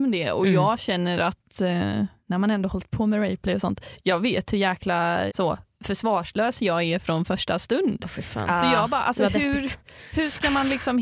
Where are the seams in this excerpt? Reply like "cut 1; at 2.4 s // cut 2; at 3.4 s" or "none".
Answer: cut 1; at 5.3 s